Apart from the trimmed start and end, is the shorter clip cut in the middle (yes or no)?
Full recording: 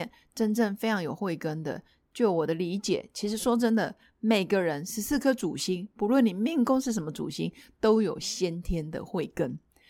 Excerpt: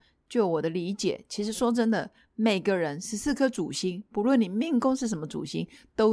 no